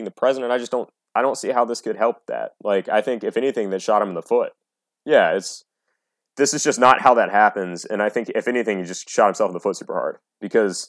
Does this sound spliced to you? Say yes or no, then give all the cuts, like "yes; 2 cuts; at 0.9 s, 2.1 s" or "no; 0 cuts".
no; 0 cuts